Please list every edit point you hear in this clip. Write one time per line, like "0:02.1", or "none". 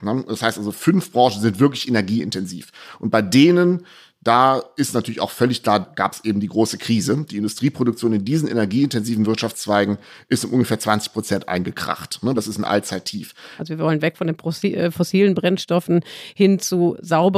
0:05.8
0:12.4
0:13.6